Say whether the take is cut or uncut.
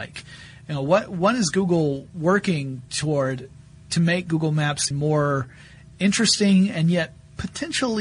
cut